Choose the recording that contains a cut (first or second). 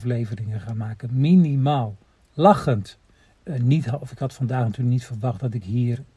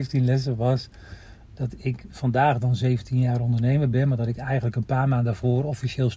first